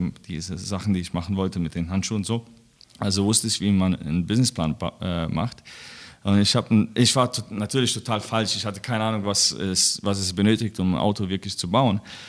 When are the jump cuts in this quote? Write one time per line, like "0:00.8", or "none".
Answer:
none